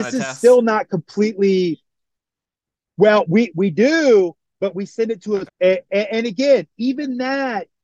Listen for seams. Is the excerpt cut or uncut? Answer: cut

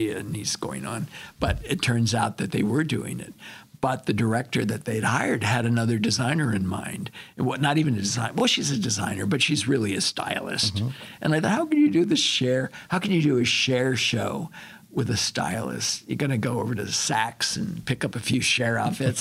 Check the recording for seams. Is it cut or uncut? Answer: uncut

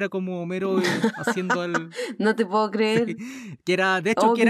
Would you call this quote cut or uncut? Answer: uncut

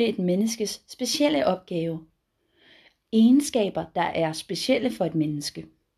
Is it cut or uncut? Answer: uncut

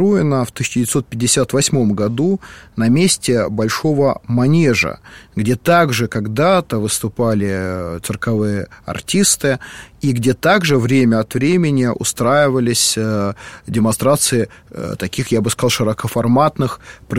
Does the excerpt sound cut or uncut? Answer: uncut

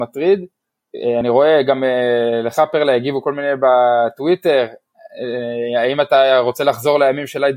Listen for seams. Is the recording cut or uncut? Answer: uncut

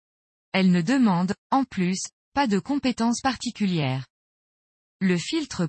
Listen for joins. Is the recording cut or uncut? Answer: uncut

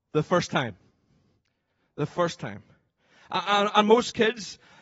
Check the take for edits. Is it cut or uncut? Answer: uncut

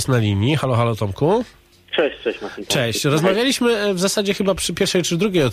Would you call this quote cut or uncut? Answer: uncut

